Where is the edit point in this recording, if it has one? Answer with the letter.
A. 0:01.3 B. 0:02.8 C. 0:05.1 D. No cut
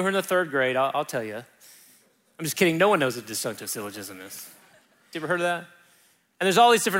C